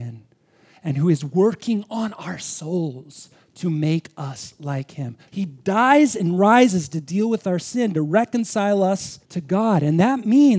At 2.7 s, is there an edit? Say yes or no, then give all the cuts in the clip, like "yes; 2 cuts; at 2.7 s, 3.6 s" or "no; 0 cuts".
no; 2 cuts; at 5.3 s, 9.3 s